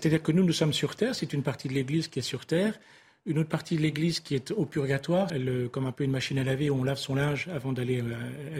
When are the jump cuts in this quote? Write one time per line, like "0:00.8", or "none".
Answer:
0:05.3